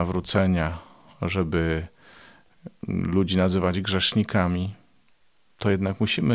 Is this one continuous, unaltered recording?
yes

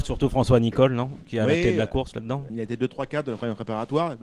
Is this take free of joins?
no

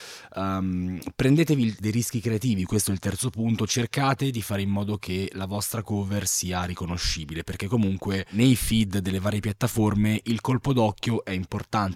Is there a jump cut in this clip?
yes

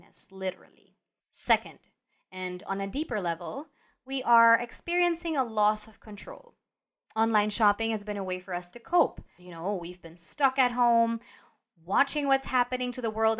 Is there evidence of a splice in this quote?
yes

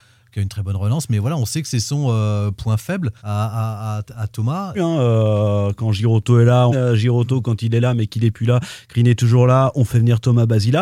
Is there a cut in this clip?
yes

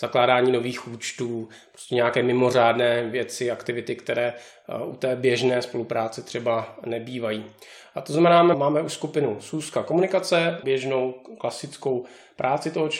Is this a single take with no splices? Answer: no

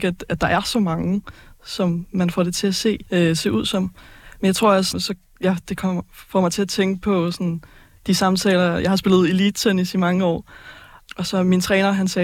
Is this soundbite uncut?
no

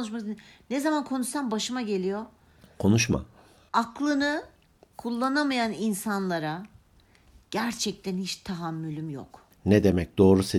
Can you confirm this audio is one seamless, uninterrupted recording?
yes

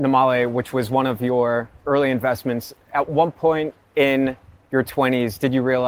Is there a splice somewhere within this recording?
no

